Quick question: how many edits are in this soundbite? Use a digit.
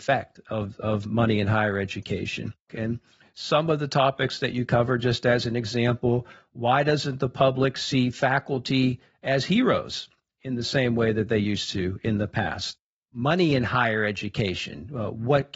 1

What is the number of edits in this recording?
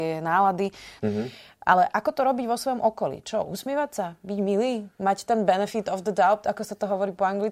1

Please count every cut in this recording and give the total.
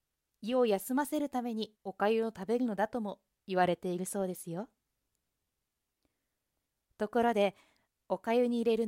1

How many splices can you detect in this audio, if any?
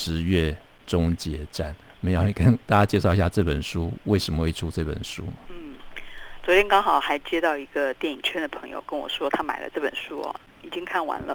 0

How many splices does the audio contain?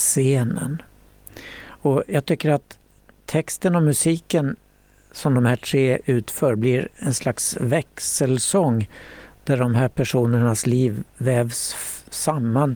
0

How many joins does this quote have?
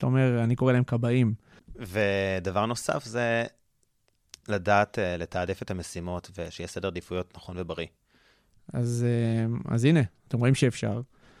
3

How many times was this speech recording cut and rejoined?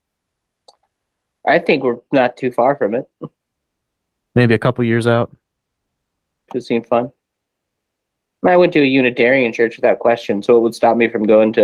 1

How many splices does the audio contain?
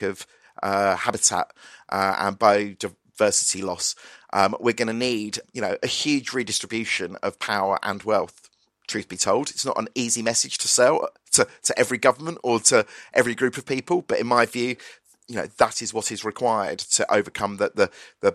0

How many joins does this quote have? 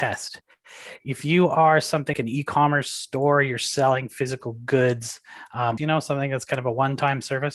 2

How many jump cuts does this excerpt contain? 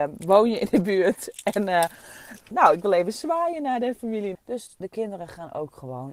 2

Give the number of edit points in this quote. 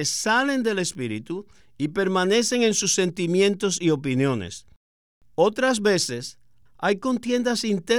1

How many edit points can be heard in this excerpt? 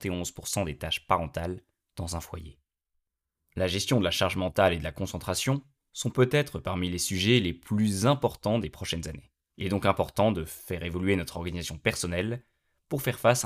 1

